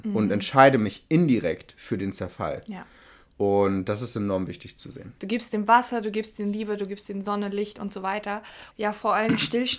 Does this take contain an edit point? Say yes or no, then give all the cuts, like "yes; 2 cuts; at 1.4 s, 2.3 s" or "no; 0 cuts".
yes; 2 cuts; at 5.2 s, 8.7 s